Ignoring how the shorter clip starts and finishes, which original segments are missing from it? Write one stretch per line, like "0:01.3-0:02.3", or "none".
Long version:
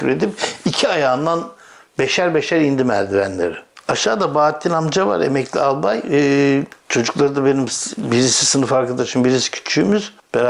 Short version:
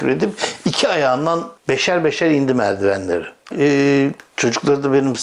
0:01.6-0:01.9
0:03.8-0:06.0